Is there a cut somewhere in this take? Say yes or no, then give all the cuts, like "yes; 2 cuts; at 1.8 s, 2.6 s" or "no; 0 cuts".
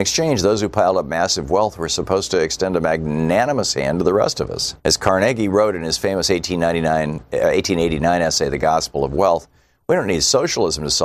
yes; 1 cut; at 4.8 s